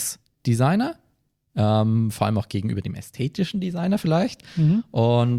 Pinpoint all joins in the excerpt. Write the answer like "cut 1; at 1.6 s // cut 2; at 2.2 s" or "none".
none